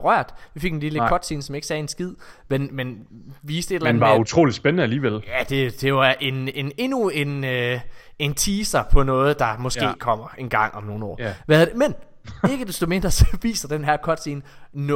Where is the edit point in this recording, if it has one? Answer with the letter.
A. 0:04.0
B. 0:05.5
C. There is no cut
C